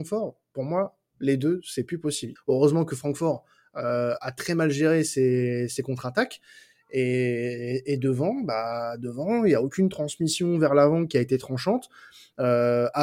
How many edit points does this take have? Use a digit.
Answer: 1